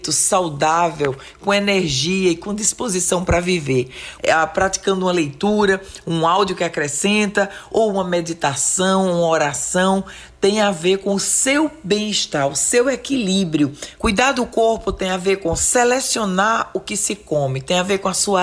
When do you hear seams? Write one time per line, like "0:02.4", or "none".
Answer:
0:04.2
0:14.0